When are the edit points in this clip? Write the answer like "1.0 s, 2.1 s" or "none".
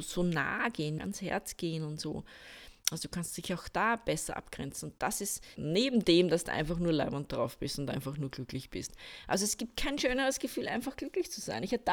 1.0 s, 5.6 s